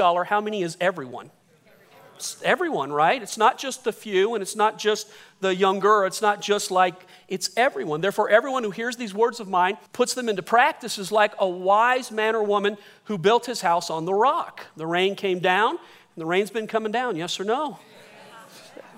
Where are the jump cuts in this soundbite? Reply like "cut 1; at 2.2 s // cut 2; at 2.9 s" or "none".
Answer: cut 1; at 9.9 s